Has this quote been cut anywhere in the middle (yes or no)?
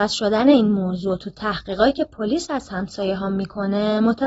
no